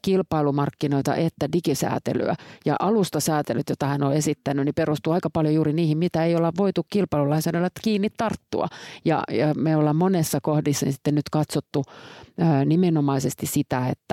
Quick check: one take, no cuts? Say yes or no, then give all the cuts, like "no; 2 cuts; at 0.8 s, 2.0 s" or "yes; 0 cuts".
yes; 0 cuts